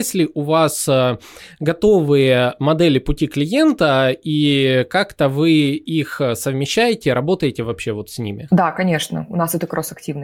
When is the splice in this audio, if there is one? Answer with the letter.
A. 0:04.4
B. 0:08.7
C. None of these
C